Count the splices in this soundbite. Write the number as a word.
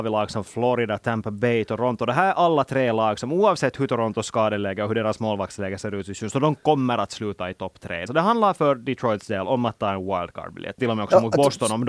two